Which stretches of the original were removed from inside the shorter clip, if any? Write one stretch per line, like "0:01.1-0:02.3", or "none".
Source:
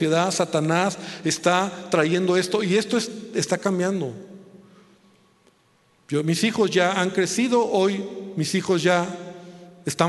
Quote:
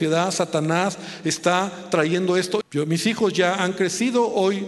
0:02.6-0:06.0